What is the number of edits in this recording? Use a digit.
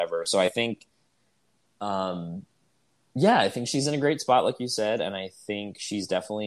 0